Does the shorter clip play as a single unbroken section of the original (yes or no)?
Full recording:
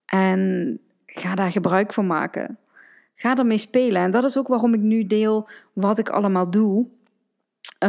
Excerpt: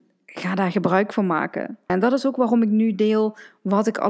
no